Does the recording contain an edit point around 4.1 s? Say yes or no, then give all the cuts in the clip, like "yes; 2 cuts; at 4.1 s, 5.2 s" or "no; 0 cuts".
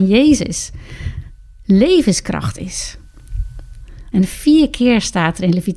yes; 1 cut; at 4.1 s